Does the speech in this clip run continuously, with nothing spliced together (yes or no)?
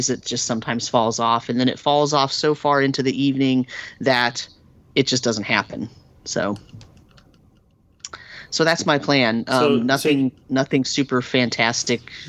yes